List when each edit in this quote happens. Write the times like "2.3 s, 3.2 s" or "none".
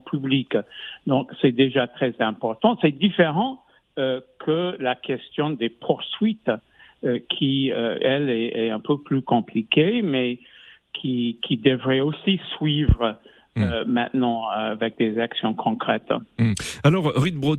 none